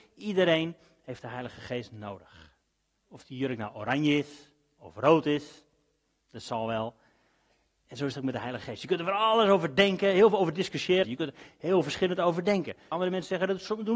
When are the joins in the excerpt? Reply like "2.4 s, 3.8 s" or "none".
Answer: 3.0 s, 11.0 s, 12.9 s